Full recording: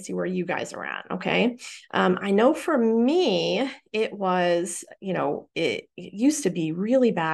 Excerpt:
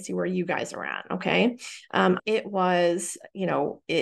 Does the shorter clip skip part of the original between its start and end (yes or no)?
yes